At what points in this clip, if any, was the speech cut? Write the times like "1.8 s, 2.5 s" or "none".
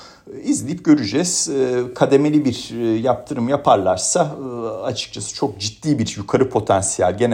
none